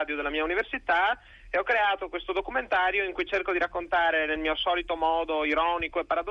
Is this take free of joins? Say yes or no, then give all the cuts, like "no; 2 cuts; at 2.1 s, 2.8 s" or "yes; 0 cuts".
yes; 0 cuts